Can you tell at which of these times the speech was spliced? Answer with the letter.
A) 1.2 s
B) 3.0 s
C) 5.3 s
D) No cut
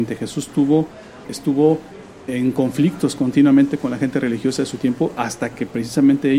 A